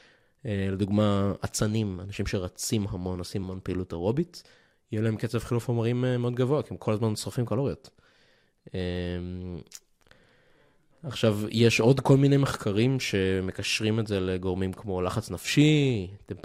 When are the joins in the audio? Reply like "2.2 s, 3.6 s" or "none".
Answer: 3.4 s